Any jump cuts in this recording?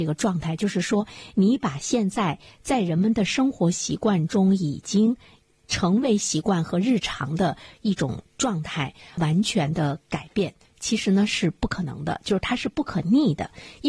no; 0 cuts

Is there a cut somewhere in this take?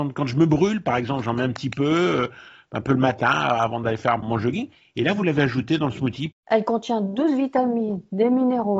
yes; 2 cuts; at 4.2 s, 6.3 s

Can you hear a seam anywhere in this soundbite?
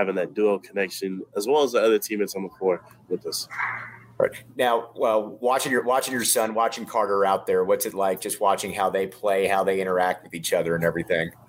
no; 0 cuts

